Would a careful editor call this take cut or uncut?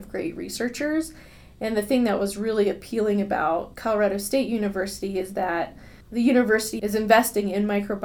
uncut